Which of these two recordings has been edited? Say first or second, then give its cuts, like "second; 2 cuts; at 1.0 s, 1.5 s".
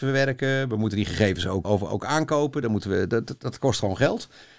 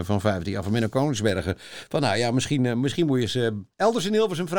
first; 1 cut; at 1.6 s